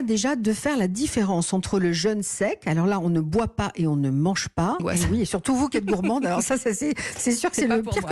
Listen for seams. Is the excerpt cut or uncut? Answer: cut